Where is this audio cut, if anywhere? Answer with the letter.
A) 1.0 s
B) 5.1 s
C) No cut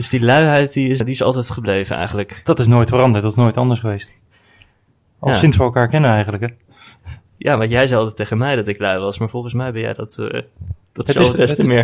A